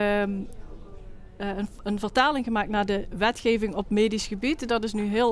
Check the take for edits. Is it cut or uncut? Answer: cut